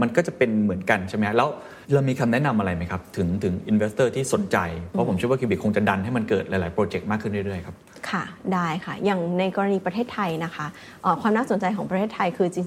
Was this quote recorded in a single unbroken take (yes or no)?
no